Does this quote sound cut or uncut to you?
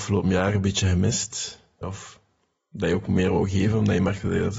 cut